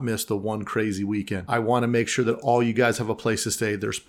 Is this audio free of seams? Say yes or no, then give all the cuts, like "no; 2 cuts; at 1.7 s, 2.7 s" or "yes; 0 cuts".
no; 1 cut; at 1.5 s